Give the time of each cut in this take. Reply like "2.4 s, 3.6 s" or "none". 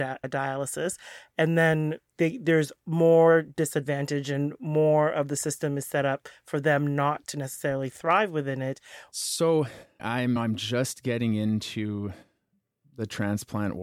2.2 s, 9.1 s